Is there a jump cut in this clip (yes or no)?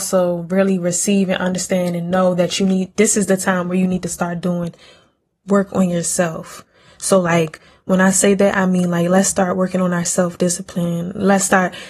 no